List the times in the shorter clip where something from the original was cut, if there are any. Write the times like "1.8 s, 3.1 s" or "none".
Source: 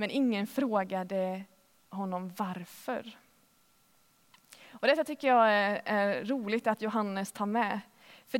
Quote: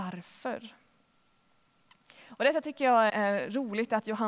3.1 s